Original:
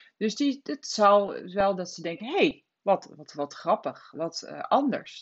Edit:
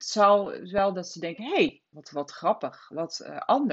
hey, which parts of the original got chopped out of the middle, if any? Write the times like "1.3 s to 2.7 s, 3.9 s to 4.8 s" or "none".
2.8 s to 3.2 s

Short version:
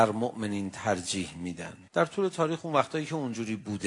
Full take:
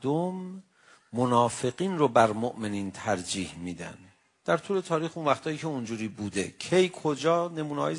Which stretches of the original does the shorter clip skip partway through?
4.1 s to 4.4 s

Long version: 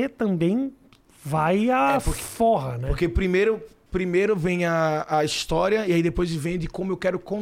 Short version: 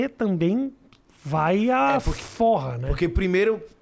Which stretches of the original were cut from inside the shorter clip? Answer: none

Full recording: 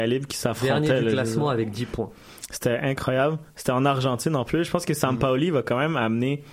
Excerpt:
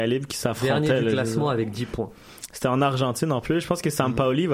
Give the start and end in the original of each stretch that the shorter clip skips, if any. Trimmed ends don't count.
2.5 s to 3.5 s

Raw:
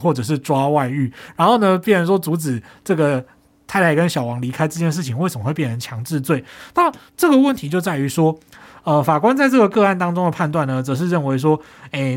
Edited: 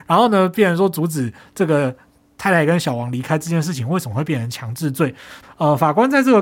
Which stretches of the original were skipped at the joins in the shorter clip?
6.7 s to 8.7 s

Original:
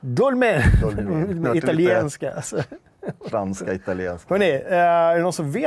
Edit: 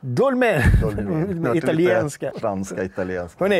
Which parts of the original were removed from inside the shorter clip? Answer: 2.3 s to 3.2 s

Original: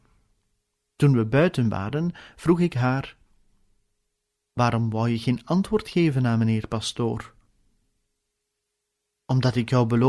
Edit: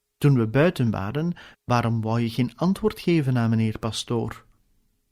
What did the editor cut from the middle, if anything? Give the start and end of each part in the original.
2.3 s to 4.4 s

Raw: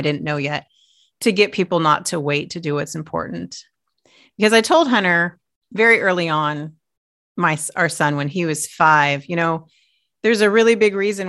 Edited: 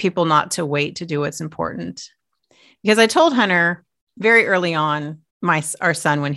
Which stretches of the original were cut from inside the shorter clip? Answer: 6.8 s to 7.3 s

